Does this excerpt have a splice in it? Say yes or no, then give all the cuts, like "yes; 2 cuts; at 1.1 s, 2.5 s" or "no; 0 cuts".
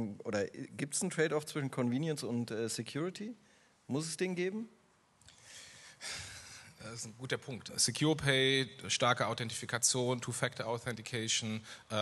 yes; 1 cut; at 7.7 s